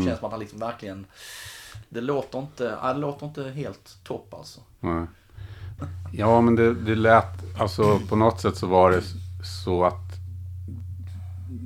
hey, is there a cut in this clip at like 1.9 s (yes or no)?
no